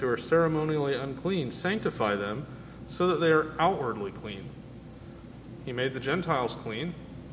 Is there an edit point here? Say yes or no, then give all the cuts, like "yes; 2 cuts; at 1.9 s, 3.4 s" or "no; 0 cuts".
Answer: yes; 1 cut; at 5.6 s